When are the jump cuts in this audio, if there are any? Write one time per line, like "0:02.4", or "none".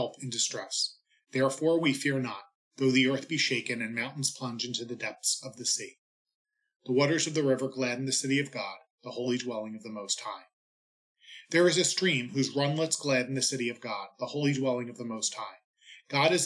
none